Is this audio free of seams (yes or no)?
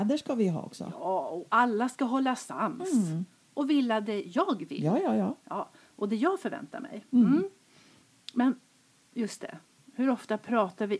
yes